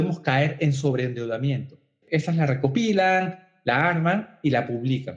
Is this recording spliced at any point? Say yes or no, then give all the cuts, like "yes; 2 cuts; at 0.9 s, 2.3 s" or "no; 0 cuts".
yes; 1 cut; at 2.0 s